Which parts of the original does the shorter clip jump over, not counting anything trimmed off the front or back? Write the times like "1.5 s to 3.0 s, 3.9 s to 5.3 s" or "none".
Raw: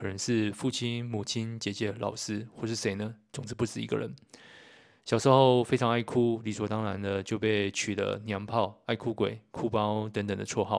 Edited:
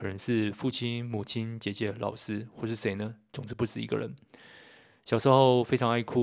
none

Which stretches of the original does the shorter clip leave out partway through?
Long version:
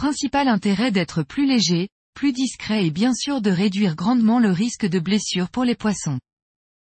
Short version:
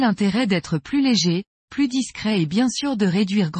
none

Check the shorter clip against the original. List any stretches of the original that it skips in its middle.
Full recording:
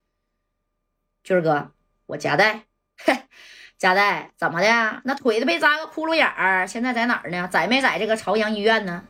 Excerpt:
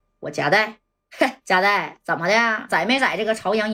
3.3 s to 3.7 s, 5.0 s to 7.5 s

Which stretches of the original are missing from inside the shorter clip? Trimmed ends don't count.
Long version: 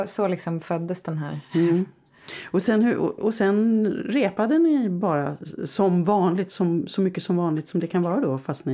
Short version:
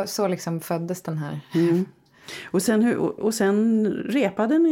none

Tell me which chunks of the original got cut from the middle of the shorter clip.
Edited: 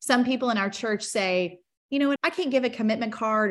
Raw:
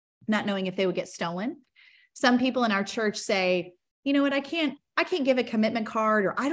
4.3 s to 4.9 s

